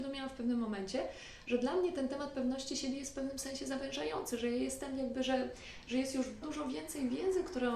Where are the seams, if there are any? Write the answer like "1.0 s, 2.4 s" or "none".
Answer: 6.4 s